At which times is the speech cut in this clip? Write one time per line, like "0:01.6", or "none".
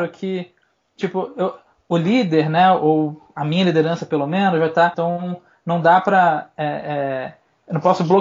0:04.9